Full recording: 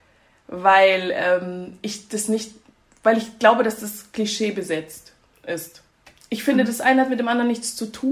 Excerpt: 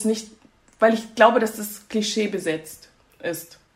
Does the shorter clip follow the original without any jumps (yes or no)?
yes